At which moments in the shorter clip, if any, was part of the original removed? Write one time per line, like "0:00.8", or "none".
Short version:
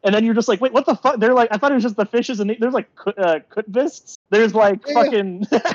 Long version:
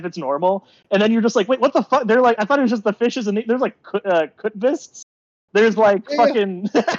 0:04.2